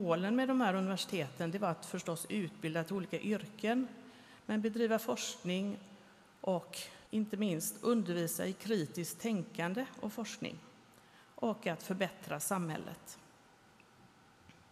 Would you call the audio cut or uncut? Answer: cut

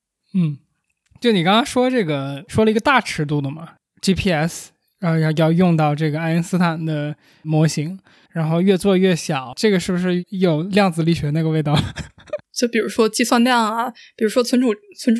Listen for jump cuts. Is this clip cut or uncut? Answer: cut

